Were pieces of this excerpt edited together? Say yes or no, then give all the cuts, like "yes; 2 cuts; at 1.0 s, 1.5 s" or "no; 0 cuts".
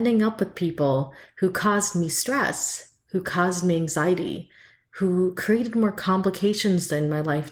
no; 0 cuts